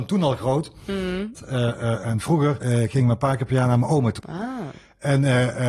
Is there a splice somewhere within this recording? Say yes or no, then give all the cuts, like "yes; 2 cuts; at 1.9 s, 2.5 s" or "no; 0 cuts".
yes; 3 cuts; at 1.3 s, 2.6 s, 4.2 s